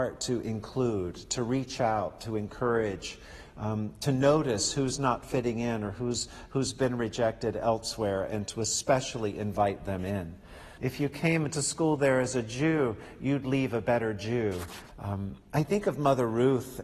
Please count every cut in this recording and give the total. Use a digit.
2